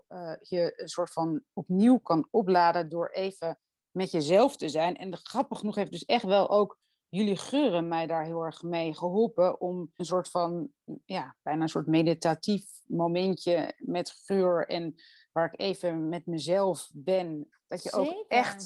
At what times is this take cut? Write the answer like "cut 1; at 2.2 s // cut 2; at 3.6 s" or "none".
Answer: cut 1; at 10.0 s // cut 2; at 17.5 s